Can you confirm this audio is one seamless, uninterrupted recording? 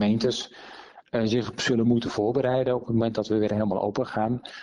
yes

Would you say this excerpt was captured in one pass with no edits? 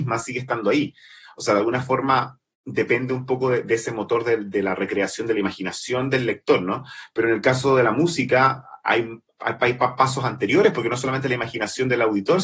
yes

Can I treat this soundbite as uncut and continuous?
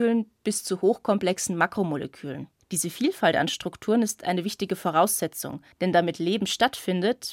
no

